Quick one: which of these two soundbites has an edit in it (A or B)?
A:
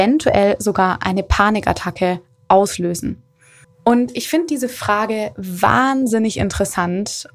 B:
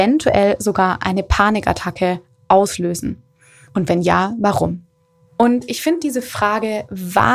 A